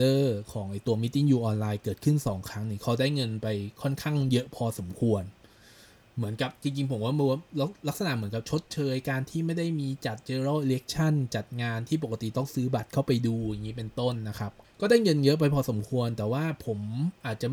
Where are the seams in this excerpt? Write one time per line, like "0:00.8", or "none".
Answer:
none